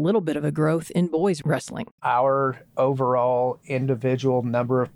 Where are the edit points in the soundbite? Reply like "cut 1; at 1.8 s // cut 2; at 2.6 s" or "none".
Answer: cut 1; at 2.0 s